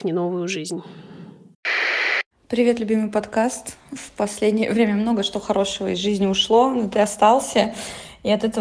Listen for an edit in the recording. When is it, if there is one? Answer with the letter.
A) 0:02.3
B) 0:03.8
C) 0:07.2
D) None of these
D